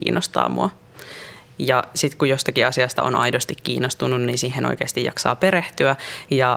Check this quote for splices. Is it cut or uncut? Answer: uncut